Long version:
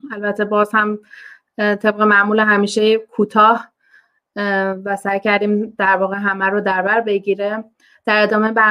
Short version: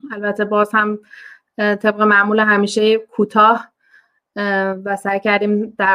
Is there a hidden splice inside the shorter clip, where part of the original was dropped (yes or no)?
no